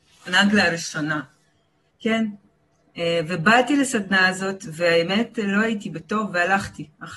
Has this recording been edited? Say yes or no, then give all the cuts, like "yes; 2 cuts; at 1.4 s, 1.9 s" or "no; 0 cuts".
yes; 1 cut; at 1.9 s